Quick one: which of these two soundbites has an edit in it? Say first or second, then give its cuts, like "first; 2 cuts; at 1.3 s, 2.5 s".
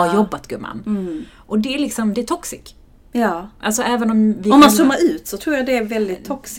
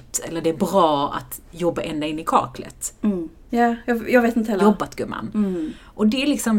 second; 2 cuts; at 3.5 s, 4.6 s